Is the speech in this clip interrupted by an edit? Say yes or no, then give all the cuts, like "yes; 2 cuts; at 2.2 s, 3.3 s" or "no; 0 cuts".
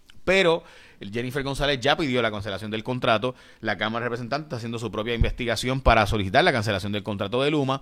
no; 0 cuts